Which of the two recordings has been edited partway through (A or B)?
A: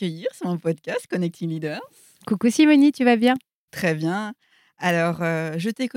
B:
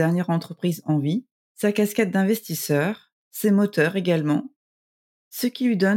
B